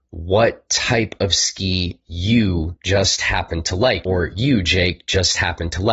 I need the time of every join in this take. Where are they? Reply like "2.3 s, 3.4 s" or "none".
4.0 s